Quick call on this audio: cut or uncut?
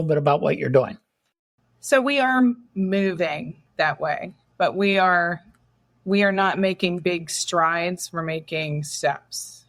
uncut